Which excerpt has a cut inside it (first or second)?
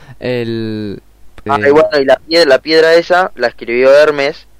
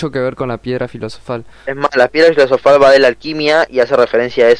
first